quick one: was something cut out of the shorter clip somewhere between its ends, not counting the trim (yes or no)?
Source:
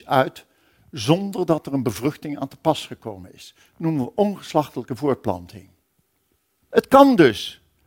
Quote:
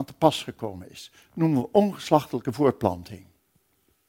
no